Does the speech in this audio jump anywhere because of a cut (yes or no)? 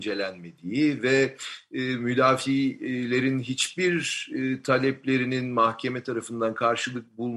no